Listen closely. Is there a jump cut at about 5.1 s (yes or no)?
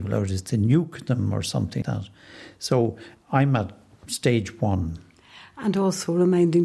no